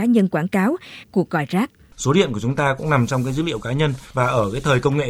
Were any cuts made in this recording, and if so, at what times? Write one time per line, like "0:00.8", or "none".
0:01.0